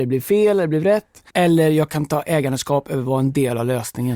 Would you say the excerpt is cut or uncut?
cut